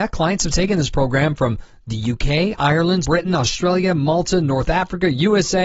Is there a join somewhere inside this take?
yes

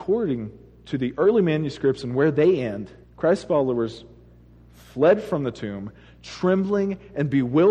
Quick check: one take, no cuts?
no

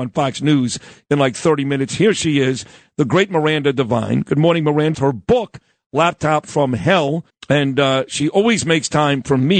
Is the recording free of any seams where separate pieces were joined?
no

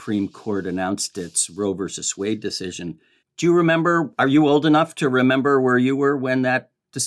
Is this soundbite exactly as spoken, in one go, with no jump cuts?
yes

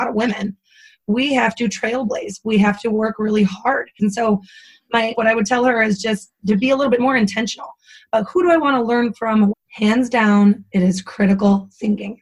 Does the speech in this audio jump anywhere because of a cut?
yes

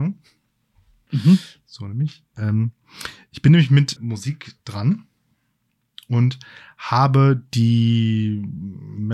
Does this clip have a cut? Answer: yes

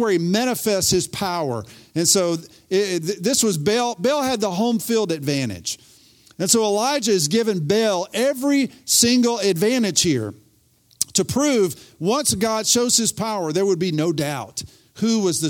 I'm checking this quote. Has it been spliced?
no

